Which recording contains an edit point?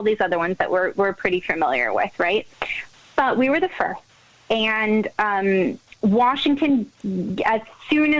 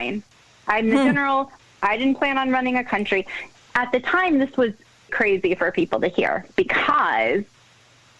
second; 1 cut; at 5.1 s

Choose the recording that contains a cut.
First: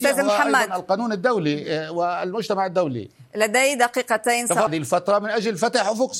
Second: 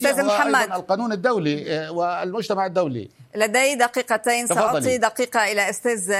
first; 1 cut; at 4.7 s

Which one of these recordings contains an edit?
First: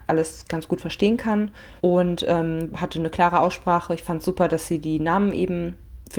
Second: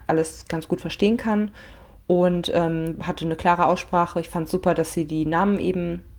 first; 1 cut; at 1.8 s

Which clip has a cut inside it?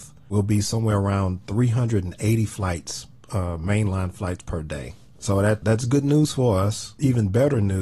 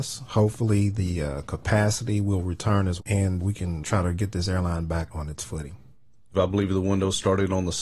second; 2 cuts; at 3.0 s, 6.3 s

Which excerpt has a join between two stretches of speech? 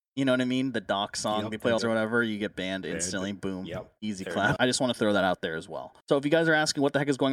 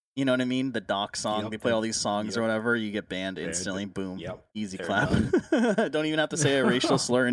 first; 3 cuts; at 1.8 s, 4.6 s, 6.0 s

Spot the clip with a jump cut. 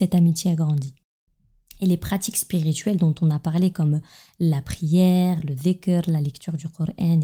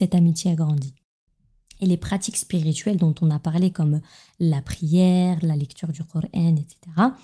second; 1 cut; at 5.4 s

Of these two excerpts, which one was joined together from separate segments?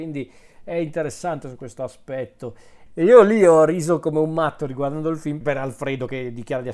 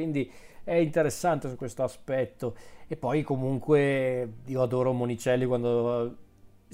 first; 2 cuts; at 2.9 s, 5.4 s

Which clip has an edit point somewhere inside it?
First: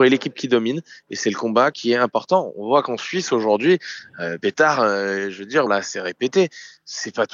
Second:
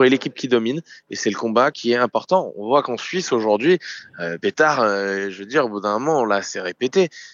first; 1 cut; at 5.7 s

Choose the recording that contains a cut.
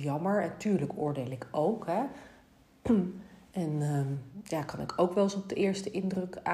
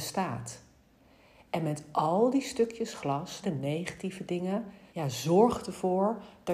second; 2 cuts; at 3.4 s, 4.9 s

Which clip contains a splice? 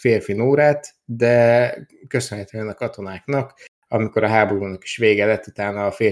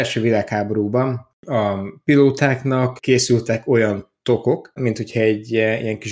second; 1 cut; at 4.8 s

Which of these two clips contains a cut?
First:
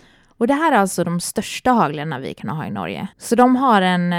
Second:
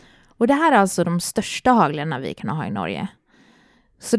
first; 1 cut; at 3.1 s

